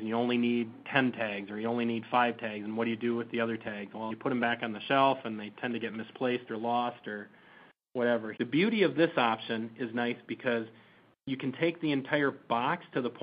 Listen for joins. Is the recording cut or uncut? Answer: cut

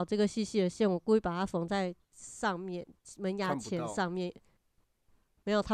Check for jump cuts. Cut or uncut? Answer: uncut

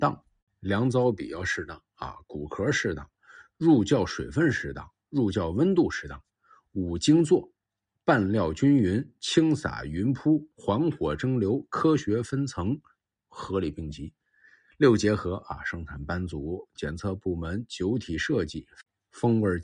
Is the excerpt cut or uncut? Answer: cut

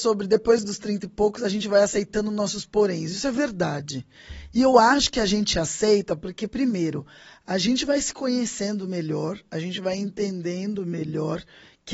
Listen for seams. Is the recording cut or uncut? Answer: uncut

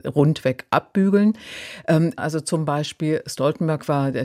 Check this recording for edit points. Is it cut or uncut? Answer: cut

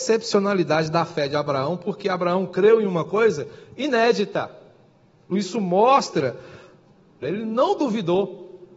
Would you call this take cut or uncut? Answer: cut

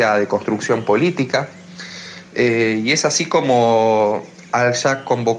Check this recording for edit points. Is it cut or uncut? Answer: uncut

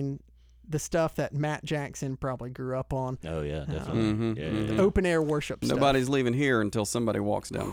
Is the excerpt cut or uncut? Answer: uncut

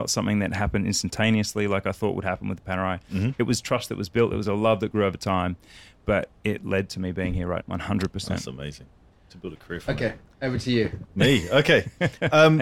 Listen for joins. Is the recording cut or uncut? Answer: cut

